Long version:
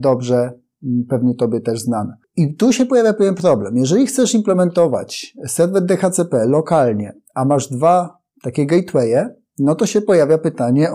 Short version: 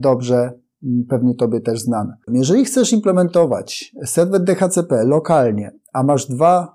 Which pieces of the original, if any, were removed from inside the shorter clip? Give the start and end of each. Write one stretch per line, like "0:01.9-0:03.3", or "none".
0:02.3-0:03.7